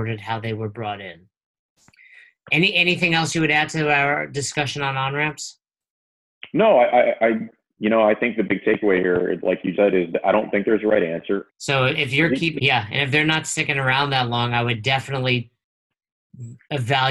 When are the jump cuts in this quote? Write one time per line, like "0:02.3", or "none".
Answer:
0:09.7
0:11.5
0:12.6